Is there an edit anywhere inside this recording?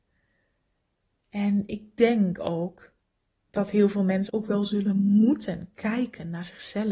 yes; 1 cut; at 4.3 s

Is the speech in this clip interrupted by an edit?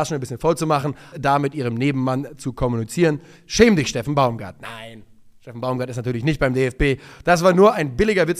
yes; 1 cut; at 1.1 s

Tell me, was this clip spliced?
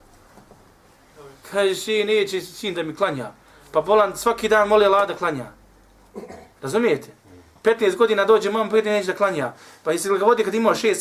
no; 0 cuts

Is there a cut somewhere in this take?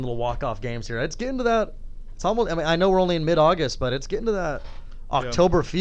no; 0 cuts

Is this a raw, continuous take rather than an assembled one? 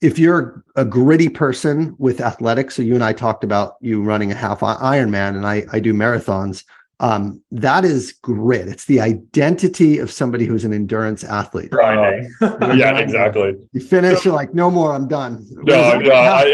no; 1 cut; at 11.7 s

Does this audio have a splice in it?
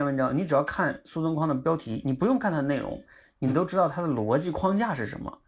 no; 0 cuts

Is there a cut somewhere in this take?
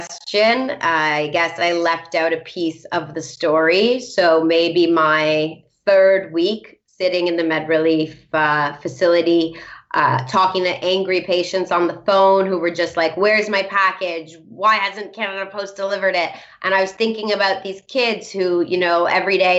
no; 0 cuts

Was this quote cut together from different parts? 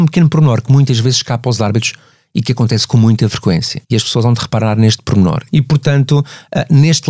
yes; 2 cuts; at 3.8 s, 5.5 s

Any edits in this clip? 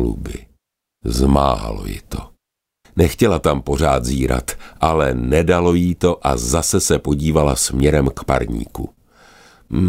yes; 1 cut; at 2.8 s

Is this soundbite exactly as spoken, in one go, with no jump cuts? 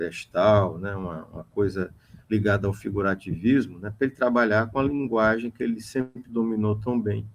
yes; 0 cuts

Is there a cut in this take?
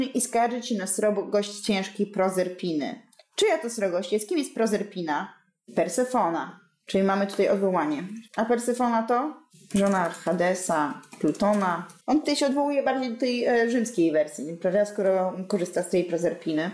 no; 0 cuts

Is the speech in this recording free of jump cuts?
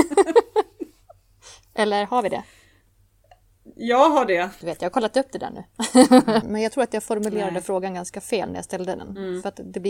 no; 2 cuts; at 4.6 s, 6.4 s

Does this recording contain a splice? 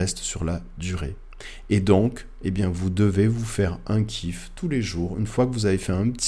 no; 0 cuts

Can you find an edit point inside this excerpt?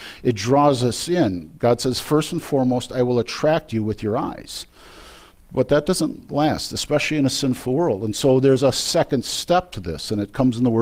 no; 0 cuts

